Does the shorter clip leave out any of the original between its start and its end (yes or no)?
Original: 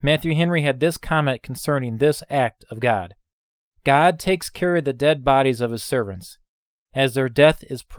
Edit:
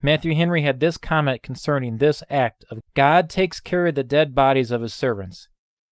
yes